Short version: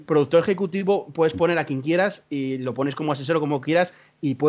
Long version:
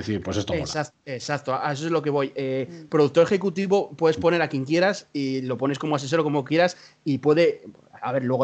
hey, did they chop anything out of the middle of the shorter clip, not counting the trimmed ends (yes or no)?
no